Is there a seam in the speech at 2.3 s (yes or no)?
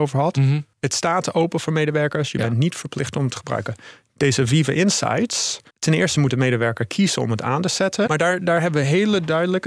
no